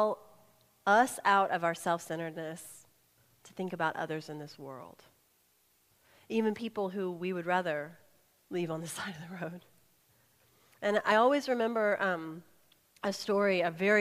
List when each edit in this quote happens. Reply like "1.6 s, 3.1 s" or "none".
none